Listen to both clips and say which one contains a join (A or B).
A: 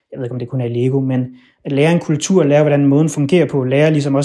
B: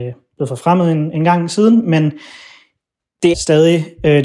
B